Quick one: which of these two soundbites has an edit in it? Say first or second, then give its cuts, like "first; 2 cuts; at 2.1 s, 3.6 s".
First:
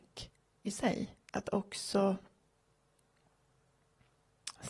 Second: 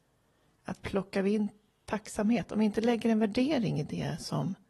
first; 1 cut; at 1.2 s